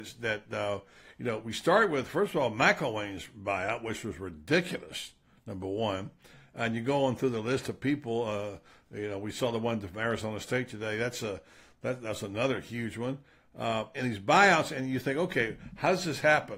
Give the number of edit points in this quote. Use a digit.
1